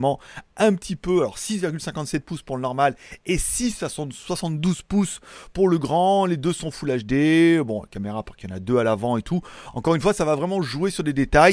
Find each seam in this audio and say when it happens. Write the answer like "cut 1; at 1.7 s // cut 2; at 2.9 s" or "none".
none